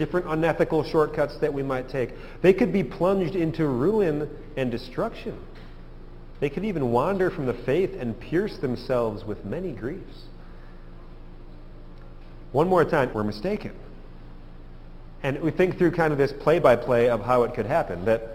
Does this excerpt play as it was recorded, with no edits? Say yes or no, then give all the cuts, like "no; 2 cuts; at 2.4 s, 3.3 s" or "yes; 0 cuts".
no; 1 cut; at 13.1 s